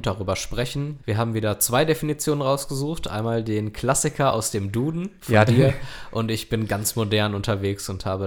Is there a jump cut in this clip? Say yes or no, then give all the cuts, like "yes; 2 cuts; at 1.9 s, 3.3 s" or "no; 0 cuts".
yes; 1 cut; at 1.0 s